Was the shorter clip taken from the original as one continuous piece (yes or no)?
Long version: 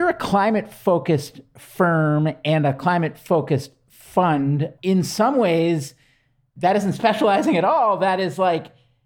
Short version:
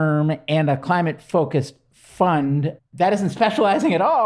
no